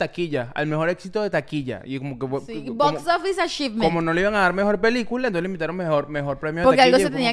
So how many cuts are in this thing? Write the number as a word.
zero